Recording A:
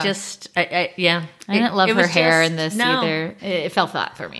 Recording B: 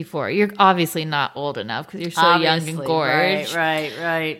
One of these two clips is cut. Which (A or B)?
A